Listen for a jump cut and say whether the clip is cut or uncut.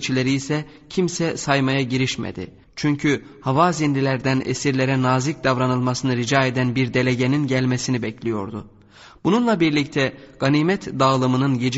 cut